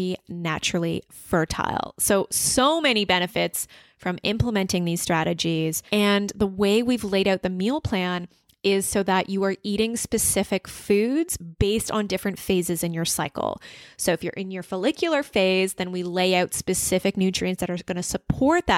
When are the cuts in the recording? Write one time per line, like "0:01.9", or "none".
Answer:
0:05.9